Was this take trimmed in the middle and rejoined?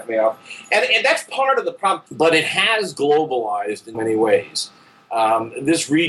yes; 2 cuts; at 2.1 s, 3.9 s

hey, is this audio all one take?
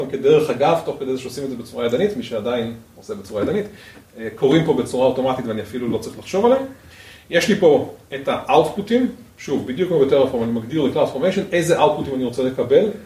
yes; 0 cuts

